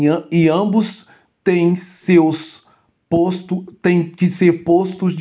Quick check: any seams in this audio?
no; 0 cuts

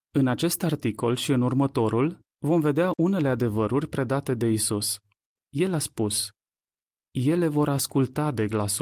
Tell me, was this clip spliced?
yes; 1 cut; at 5.4 s

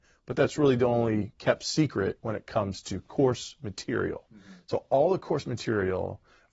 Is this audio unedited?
yes; 0 cuts

